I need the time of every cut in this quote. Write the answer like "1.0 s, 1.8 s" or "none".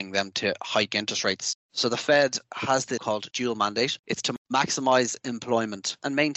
3.0 s